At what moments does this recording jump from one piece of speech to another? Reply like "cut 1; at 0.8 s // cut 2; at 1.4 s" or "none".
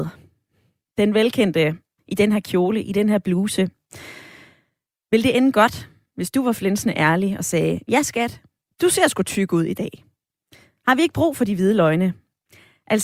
cut 1; at 2.0 s